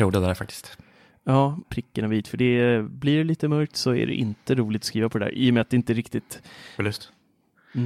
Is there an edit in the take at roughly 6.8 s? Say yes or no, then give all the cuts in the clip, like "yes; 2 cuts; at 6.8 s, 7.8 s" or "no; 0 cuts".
yes; 2 cuts; at 1.6 s, 6.8 s